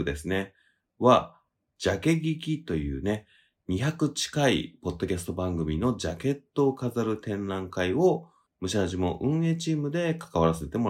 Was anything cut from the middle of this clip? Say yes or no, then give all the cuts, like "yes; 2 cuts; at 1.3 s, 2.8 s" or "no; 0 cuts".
yes; 1 cut; at 1.7 s